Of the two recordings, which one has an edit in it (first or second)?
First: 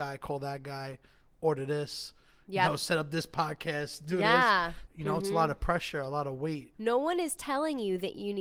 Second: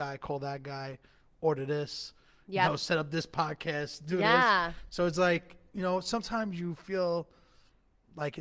first